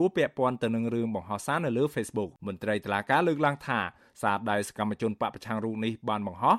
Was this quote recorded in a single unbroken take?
no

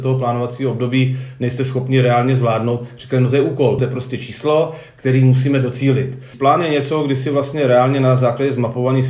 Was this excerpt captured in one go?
no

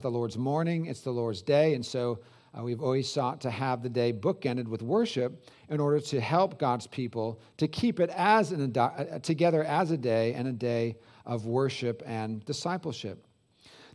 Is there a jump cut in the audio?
no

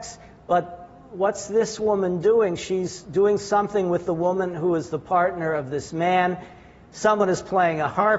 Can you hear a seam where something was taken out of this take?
no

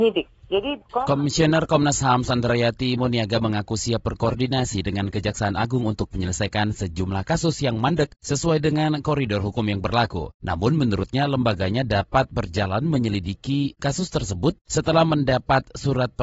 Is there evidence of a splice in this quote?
yes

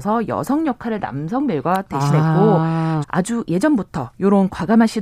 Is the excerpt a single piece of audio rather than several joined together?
no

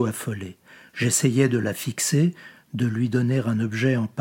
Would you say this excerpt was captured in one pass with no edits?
yes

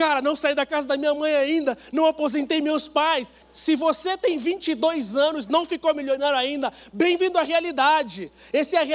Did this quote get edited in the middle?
yes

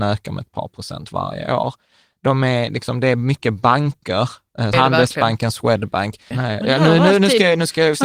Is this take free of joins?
no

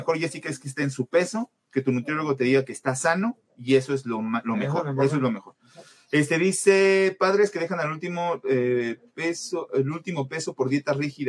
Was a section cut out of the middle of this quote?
no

